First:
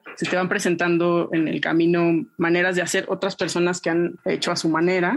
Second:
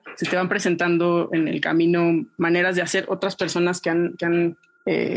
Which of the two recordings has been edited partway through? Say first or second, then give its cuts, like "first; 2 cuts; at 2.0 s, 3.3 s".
first; 1 cut; at 4.2 s